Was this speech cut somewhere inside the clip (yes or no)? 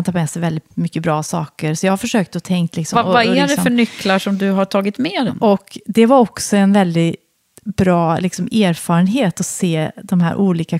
yes